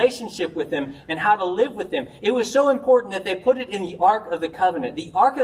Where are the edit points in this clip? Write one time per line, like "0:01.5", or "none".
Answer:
none